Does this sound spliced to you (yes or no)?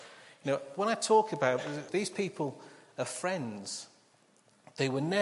yes